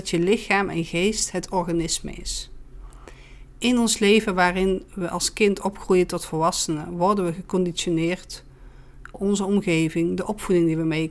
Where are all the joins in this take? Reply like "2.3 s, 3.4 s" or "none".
9.1 s